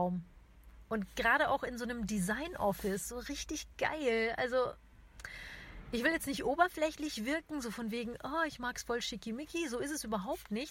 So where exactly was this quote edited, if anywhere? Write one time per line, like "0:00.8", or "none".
none